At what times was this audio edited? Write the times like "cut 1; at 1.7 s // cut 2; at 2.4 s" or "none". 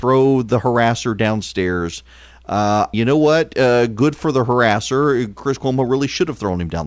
cut 1; at 2.9 s